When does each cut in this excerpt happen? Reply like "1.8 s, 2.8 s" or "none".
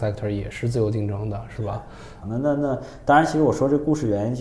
2.2 s